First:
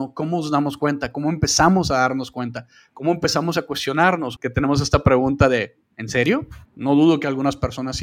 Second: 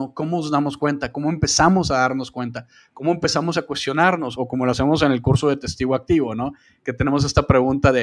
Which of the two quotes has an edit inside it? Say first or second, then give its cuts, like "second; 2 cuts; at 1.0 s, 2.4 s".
first; 2 cuts; at 4.4 s, 6.7 s